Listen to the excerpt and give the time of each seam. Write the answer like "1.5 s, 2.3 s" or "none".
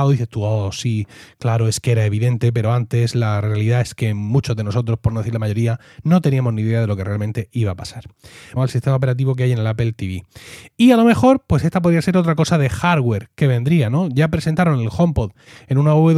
8.6 s